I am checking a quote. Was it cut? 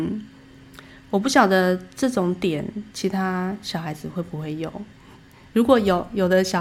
no; 0 cuts

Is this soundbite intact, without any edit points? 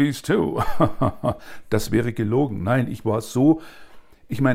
yes; 0 cuts

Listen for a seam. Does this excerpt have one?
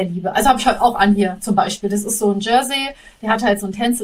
no; 0 cuts

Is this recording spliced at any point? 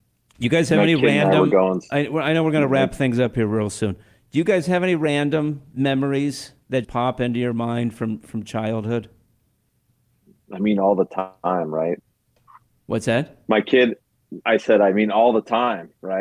yes; 1 cut; at 6.8 s

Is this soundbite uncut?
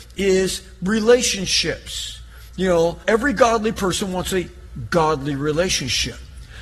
yes; 0 cuts

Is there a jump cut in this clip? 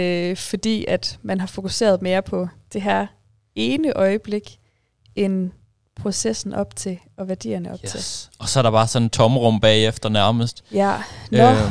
no; 0 cuts

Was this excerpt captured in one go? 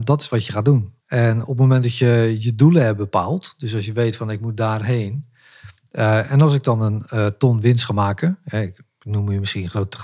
no; 1 cut; at 1.0 s

